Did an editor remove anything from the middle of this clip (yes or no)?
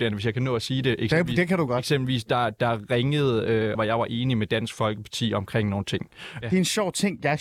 yes